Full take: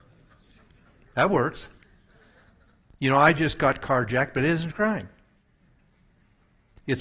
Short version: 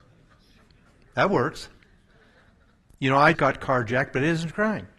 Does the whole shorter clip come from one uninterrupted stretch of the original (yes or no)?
no